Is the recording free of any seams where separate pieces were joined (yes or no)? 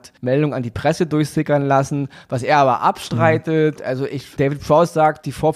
no